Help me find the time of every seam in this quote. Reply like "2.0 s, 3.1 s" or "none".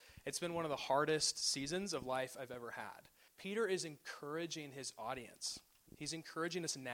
3.3 s